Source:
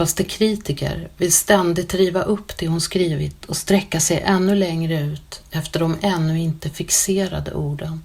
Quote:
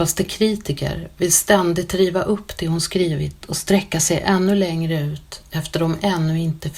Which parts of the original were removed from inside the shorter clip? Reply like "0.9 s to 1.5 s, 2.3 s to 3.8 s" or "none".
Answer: none